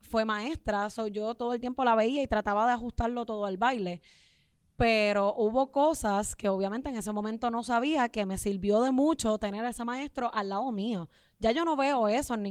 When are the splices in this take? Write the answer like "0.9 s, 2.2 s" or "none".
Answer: none